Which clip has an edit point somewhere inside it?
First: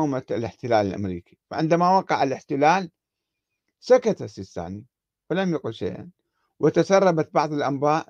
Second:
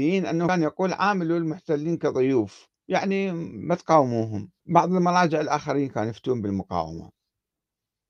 second; 2 cuts; at 2.8 s, 4.6 s

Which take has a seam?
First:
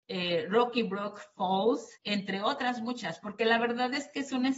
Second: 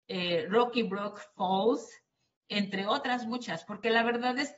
first; 1 cut; at 1.9 s

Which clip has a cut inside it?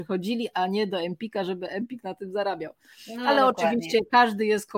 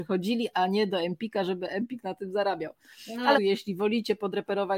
second; 1 cut; at 3.3 s

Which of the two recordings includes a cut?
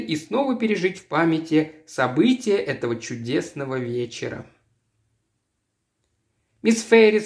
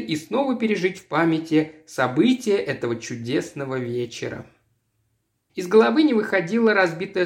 second; 1 cut; at 5.5 s

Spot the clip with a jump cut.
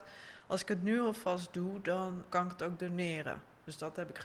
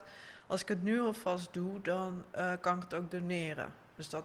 first; 1 cut; at 2.3 s

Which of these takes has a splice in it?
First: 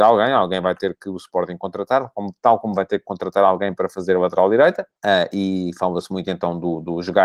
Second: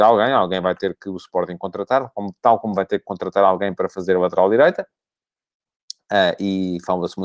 first; 1 cut; at 5.0 s

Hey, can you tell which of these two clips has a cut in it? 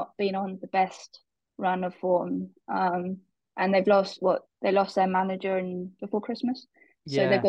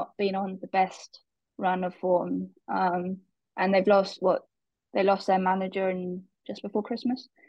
first; 2 cuts; at 4.5 s, 6.0 s

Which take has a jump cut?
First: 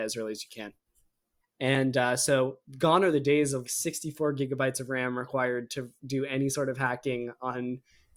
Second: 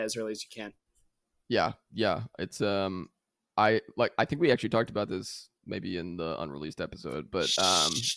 first; 2 cuts; at 1.4 s, 3.6 s

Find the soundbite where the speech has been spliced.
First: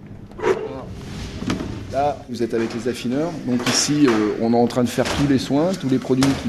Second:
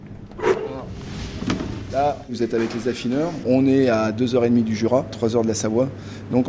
second; 1 cut; at 3.4 s

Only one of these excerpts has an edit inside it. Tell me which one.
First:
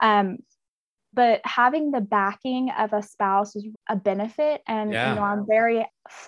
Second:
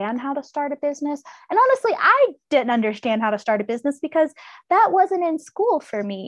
first; 2 cuts; at 1.1 s, 3.7 s

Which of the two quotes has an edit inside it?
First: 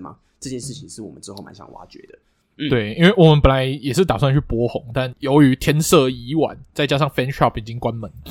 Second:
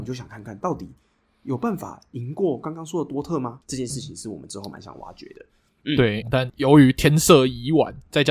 second; 2 cuts; at 3.6 s, 6.2 s

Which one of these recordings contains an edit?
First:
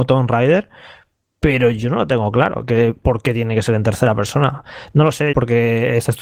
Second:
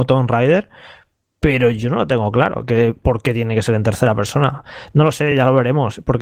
first; 1 cut; at 5.3 s

